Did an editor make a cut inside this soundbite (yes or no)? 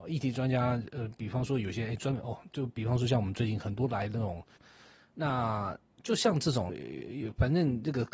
yes